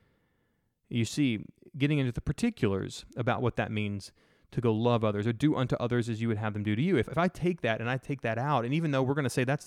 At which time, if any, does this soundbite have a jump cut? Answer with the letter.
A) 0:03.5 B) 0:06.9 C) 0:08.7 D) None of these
D